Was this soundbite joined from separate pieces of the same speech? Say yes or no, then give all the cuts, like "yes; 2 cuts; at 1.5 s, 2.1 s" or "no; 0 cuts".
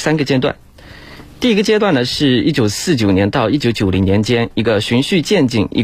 no; 0 cuts